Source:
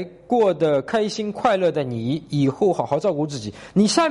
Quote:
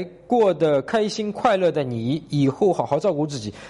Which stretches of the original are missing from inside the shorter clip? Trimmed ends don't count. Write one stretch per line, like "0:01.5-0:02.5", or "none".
none